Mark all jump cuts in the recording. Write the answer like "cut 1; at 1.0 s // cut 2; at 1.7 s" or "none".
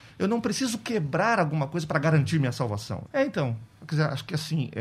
cut 1; at 3.0 s